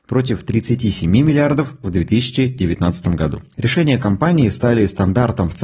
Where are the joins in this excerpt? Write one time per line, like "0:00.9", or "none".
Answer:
0:03.5